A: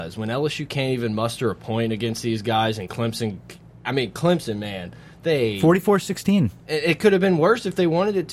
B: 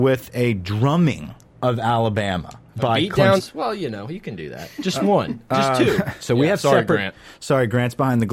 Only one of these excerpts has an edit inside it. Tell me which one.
B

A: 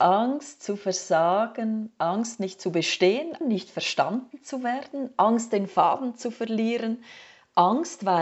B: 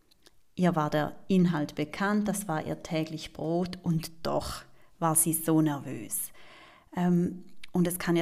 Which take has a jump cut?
A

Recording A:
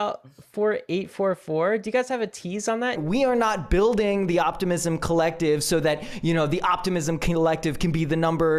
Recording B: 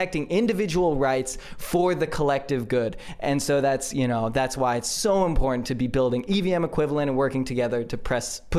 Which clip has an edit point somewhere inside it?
A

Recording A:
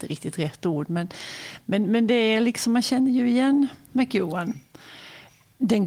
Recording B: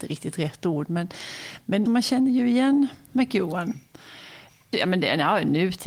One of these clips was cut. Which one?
B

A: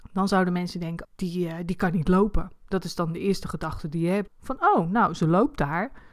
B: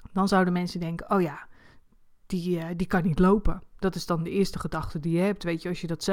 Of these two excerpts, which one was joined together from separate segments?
A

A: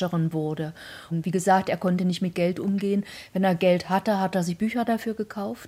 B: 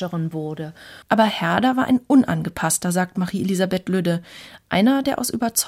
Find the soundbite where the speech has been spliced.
B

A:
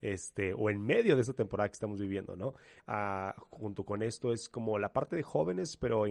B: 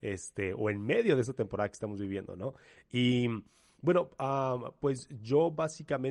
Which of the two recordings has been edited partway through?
A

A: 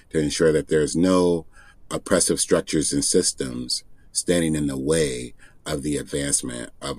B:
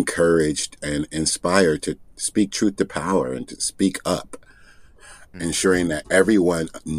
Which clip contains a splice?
B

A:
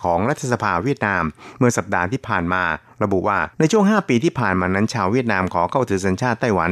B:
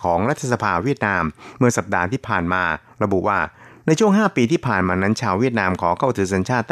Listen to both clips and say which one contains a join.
A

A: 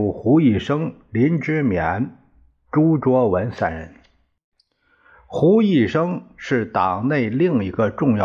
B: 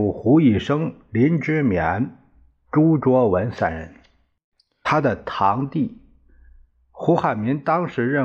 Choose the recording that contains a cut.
B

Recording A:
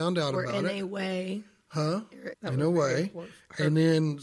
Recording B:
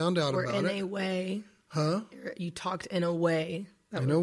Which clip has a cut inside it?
A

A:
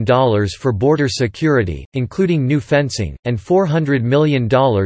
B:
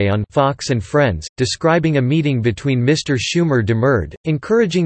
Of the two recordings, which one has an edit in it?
B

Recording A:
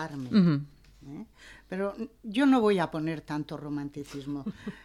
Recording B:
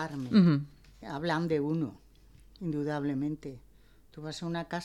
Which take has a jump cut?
B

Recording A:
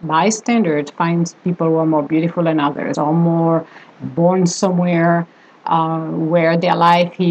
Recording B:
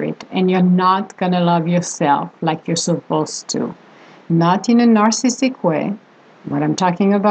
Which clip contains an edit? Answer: A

